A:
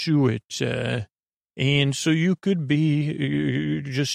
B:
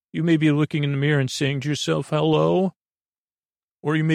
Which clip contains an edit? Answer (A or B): A